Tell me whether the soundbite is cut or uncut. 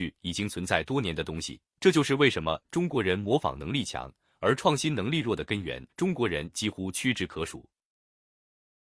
cut